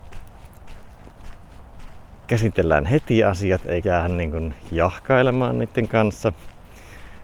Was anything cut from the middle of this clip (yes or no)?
yes